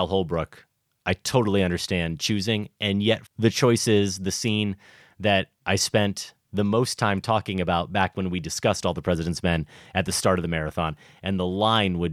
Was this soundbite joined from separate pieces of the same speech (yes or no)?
yes